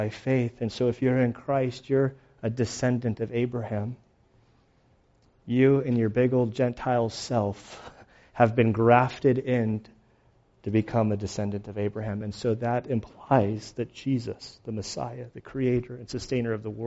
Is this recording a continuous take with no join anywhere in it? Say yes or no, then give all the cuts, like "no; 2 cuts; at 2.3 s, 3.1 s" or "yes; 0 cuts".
yes; 0 cuts